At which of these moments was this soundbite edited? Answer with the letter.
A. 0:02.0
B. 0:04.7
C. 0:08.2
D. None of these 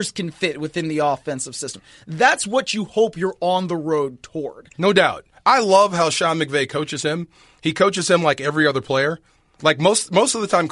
D